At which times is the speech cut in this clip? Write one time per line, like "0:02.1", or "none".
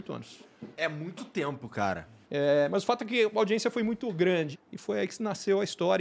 0:02.2
0:04.5